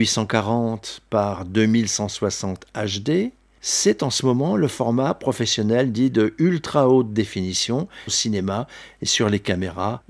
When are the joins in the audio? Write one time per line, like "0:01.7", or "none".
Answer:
0:08.1